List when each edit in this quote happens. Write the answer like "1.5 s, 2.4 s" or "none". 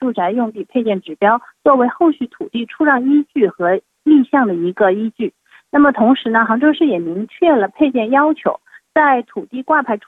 none